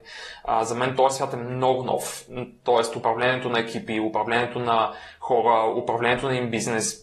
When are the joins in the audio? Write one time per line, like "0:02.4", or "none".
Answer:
none